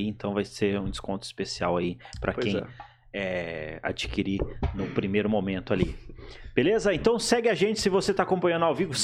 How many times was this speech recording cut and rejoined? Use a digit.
0